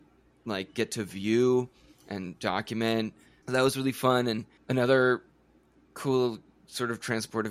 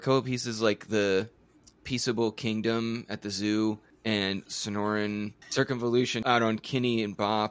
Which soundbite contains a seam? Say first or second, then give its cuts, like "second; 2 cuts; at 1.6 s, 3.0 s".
first; 1 cut; at 3.4 s